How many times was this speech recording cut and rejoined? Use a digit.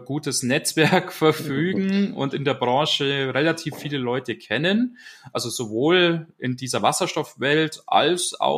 0